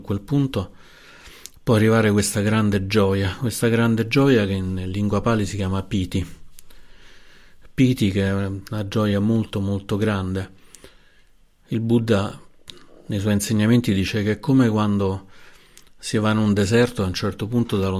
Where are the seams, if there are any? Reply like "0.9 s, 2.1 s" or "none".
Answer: none